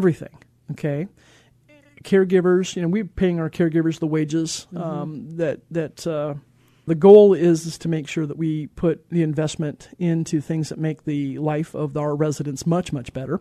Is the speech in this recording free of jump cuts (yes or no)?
no